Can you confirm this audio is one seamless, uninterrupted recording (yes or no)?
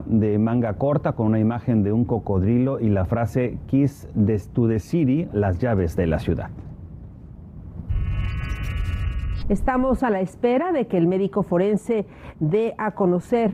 no